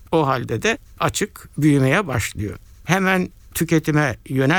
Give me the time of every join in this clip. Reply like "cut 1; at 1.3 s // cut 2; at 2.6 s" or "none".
cut 1; at 2.7 s